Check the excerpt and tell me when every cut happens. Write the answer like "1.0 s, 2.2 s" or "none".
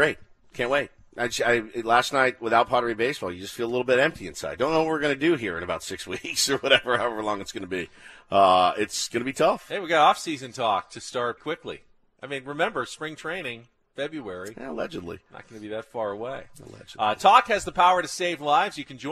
11.4 s